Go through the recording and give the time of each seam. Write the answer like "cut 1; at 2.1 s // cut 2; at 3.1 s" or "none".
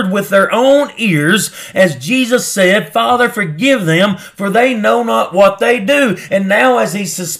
cut 1; at 6.3 s